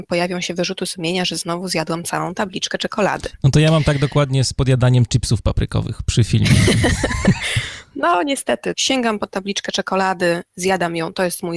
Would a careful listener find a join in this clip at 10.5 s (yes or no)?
no